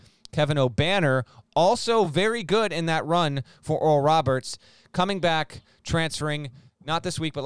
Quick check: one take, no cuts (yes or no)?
yes